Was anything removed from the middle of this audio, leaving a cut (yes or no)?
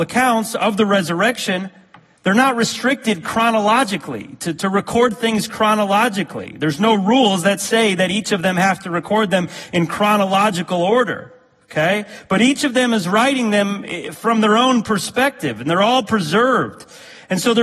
no